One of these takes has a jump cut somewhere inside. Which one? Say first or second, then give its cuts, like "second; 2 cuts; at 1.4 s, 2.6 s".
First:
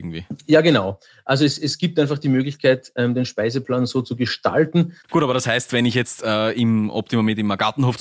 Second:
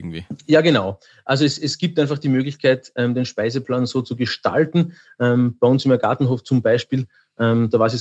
first; 1 cut; at 5.0 s